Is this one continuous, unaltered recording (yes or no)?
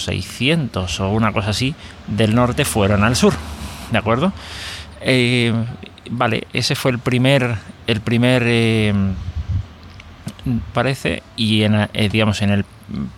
no